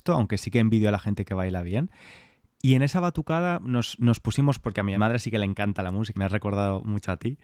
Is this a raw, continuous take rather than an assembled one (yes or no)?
no